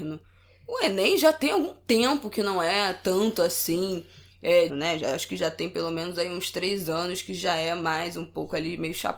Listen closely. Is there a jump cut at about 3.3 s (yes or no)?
no